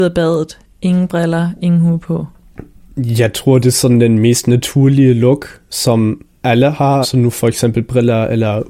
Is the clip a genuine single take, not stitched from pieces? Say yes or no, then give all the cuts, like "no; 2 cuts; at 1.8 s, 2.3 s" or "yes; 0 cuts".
no; 1 cut; at 7.0 s